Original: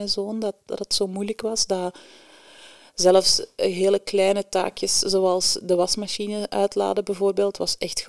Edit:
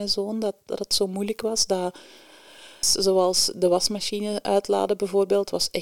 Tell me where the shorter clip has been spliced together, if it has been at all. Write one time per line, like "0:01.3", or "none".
0:02.8